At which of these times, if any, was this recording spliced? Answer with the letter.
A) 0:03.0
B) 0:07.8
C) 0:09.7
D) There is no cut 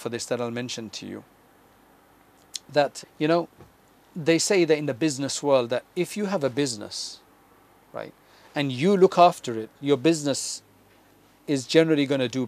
A